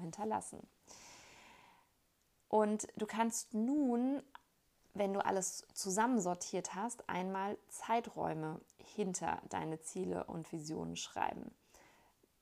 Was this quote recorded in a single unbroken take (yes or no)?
yes